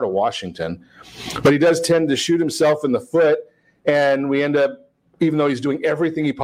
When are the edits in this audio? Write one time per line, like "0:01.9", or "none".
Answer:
none